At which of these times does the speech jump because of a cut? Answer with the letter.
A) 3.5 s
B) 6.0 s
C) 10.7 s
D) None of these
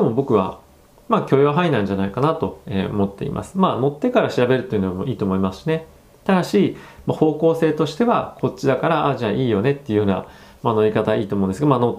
D